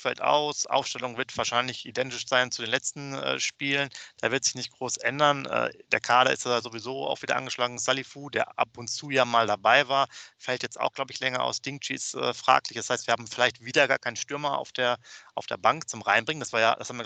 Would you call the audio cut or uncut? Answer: uncut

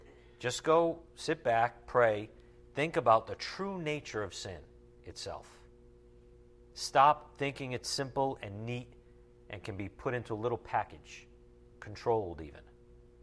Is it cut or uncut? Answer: cut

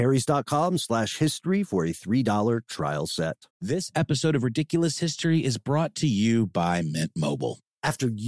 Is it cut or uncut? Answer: cut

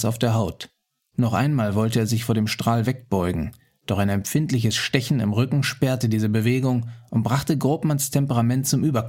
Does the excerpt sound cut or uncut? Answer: uncut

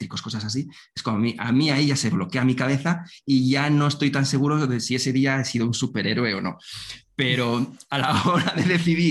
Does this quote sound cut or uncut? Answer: uncut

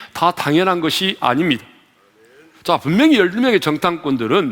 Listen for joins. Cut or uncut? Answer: uncut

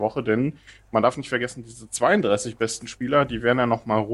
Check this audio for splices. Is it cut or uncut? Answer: uncut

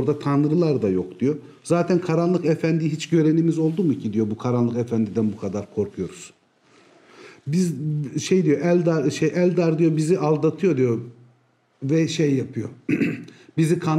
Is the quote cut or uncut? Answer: uncut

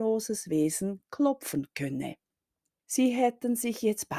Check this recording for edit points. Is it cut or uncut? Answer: cut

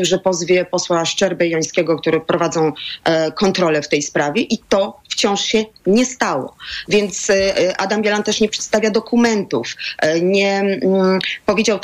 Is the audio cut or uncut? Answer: uncut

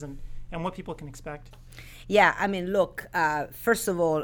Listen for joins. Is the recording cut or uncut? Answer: uncut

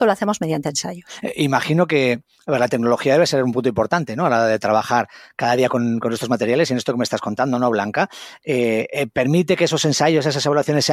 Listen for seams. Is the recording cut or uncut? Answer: uncut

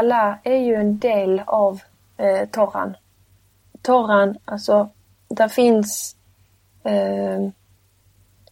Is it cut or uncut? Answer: uncut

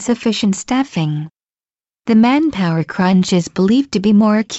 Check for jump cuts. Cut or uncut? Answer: uncut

